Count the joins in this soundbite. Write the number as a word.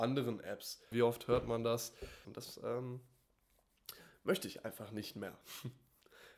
two